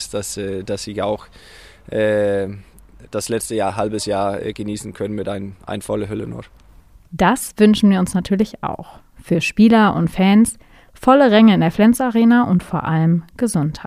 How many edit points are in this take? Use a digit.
0